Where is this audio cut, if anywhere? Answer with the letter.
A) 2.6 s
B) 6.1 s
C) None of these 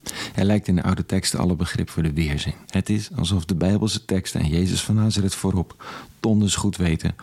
A